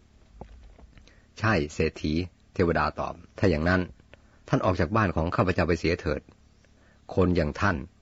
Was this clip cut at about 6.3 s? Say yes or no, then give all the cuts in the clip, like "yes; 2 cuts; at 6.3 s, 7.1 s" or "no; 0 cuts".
no; 1 cut; at 3.3 s